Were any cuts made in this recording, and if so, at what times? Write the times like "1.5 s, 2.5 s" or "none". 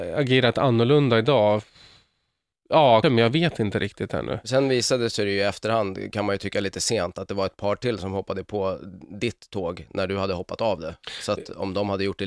3.0 s